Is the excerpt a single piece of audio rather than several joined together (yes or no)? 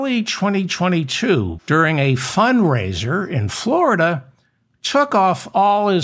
no